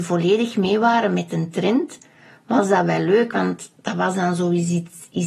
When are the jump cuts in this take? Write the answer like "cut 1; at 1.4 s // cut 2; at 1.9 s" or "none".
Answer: none

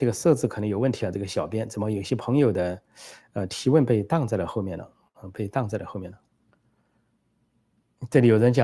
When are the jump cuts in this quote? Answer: none

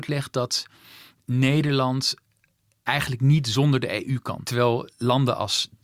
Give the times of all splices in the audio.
cut 1; at 4.4 s

